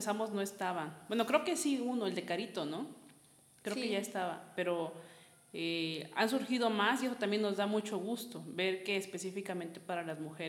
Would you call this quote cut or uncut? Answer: uncut